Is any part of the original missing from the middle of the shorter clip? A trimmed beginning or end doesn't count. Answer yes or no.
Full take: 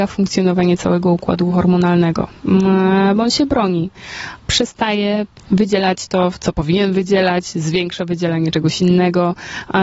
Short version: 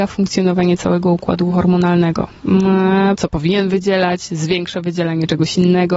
yes